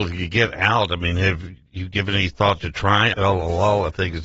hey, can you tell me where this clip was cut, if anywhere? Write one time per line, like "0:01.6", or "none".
0:03.1